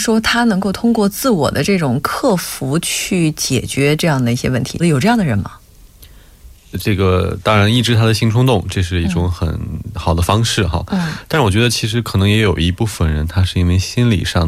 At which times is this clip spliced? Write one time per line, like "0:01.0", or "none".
0:04.8
0:06.5